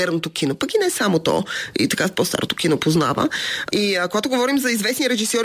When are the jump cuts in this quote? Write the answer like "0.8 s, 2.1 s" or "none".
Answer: 3.7 s